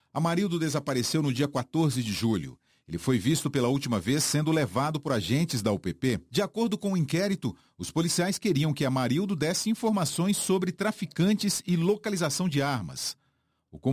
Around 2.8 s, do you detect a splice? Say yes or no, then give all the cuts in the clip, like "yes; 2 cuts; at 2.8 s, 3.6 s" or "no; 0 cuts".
no; 0 cuts